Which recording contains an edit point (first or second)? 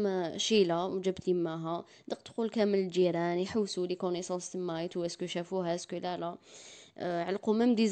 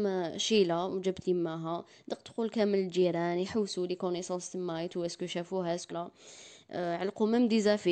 second